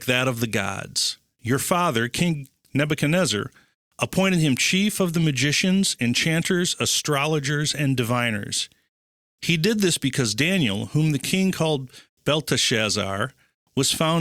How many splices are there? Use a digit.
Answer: 0